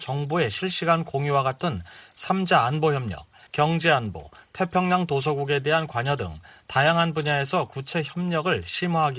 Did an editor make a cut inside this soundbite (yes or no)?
yes